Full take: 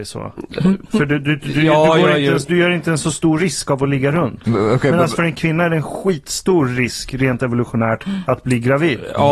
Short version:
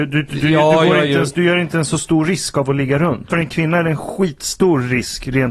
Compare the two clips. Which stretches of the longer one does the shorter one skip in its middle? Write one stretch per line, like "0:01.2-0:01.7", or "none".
0:04.4-0:05.2